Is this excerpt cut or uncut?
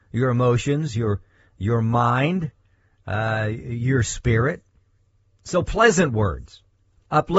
uncut